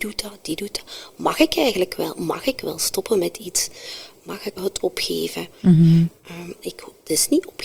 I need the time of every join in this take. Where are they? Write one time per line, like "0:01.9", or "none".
0:04.6
0:06.6